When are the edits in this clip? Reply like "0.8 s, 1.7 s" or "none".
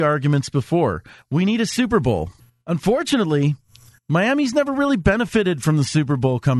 none